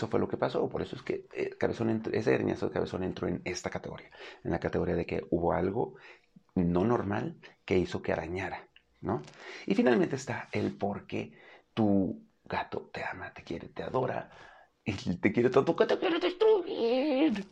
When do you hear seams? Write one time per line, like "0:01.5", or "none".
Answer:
none